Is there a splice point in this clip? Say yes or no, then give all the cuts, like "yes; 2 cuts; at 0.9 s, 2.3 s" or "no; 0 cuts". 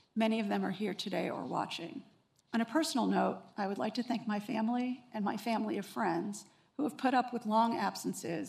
yes; 1 cut; at 2.4 s